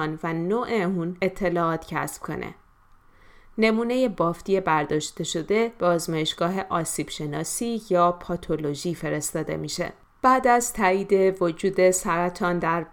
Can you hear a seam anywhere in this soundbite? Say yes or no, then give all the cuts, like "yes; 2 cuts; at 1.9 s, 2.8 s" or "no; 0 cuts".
no; 0 cuts